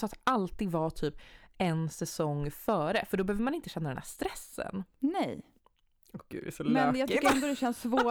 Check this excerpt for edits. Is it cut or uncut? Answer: uncut